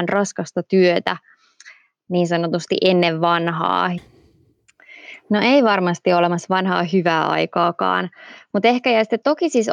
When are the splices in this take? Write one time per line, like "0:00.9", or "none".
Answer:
0:04.0